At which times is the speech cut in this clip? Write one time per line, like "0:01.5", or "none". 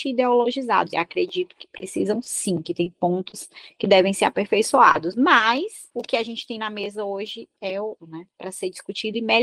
0:00.9
0:08.0

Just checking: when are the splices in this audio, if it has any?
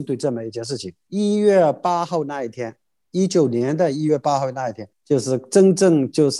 0:01.1
0:04.9

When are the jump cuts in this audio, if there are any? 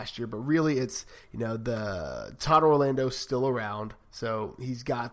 none

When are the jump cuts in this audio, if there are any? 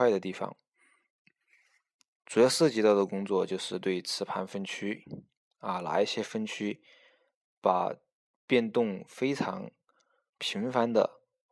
0:02.2

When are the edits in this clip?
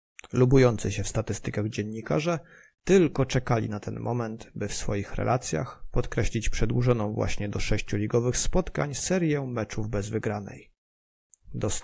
none

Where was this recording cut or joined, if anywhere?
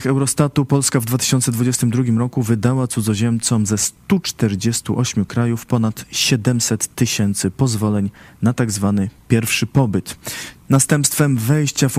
0:10.6

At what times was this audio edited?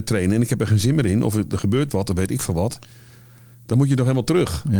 none

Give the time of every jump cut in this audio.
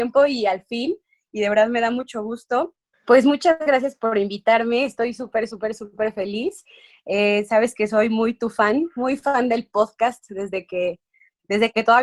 0:02.9

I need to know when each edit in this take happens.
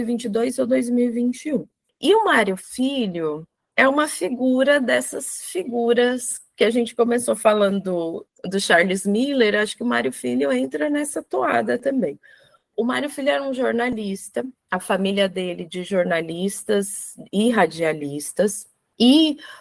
none

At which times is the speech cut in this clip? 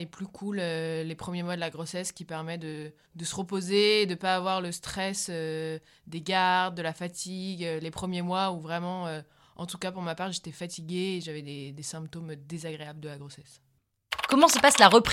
none

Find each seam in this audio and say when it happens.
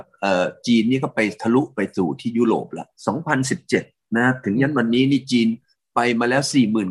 0:03.0

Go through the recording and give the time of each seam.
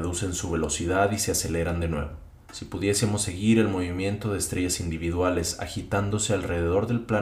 0:02.4

